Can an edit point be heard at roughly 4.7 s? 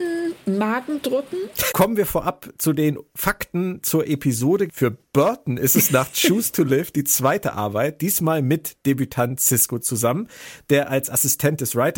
yes; 2 cuts; at 1.7 s, 4.7 s

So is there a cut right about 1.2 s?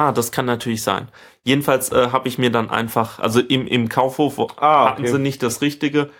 no; 0 cuts

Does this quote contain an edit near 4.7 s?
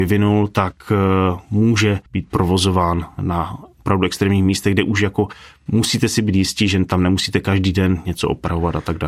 no; 1 cut; at 2.1 s

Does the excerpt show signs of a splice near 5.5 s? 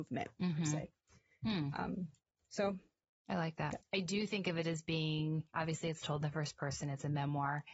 yes; 2 cuts; at 3.8 s, 5.5 s

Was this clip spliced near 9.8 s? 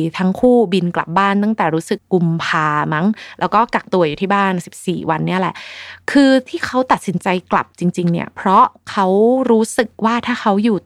no; 1 cut; at 2.0 s

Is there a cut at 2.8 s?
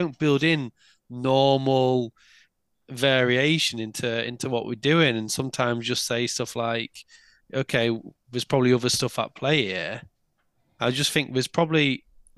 no; 0 cuts

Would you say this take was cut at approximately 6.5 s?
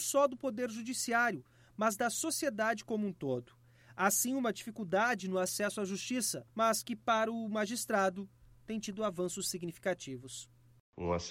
yes; 1 cut; at 6.5 s

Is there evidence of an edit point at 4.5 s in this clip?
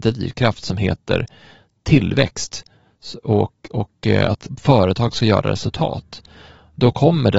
yes; 1 cut; at 4.5 s

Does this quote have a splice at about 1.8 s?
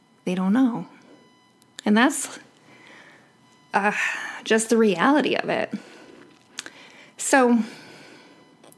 no; 0 cuts

